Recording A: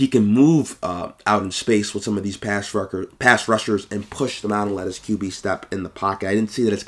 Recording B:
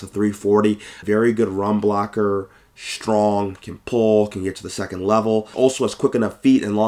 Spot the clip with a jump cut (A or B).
B